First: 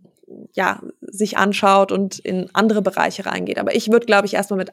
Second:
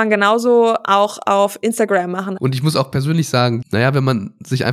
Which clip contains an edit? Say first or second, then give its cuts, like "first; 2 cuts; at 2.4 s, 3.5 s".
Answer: second; 2 cuts; at 2.4 s, 3.6 s